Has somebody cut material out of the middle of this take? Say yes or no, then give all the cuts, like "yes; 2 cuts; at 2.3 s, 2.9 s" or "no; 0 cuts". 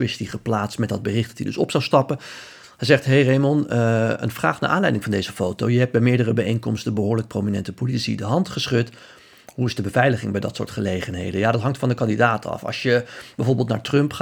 no; 0 cuts